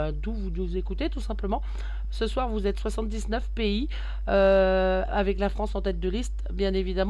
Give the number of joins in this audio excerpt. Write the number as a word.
zero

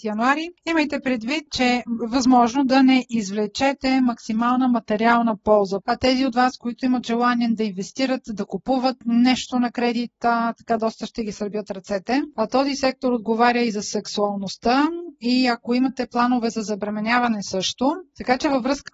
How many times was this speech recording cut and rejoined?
two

